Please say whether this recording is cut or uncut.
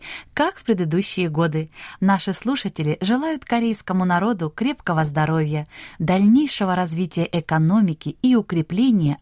cut